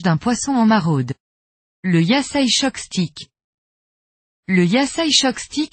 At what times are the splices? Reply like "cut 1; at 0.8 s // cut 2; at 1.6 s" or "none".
cut 1; at 1.6 s